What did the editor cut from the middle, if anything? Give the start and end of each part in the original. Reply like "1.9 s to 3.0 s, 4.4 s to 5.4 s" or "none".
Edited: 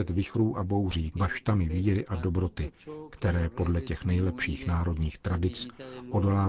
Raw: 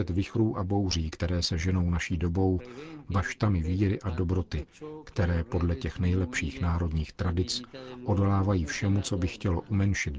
1.1 s to 3.1 s